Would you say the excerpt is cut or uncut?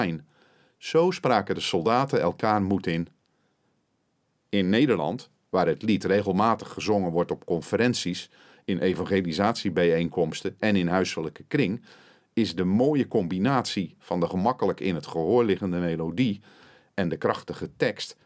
uncut